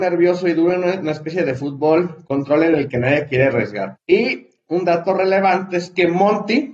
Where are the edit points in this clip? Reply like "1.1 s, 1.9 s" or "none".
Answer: 3.9 s